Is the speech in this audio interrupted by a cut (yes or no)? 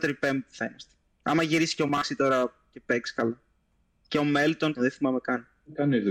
yes